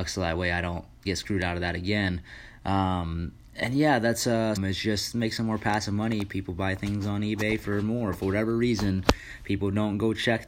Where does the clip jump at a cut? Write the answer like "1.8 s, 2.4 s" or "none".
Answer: 1.0 s, 4.6 s